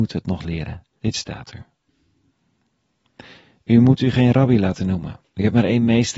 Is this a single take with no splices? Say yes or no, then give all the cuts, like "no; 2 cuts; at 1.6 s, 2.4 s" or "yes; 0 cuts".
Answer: no; 1 cut; at 1.0 s